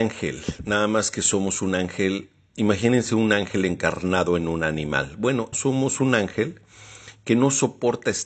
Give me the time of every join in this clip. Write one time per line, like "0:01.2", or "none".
0:05.5